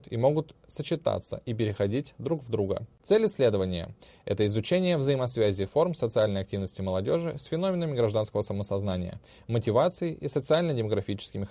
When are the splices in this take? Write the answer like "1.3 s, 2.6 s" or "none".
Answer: 3.0 s